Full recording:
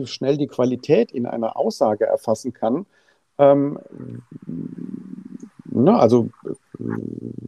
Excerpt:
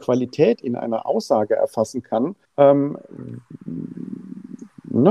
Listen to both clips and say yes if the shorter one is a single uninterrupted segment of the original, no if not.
no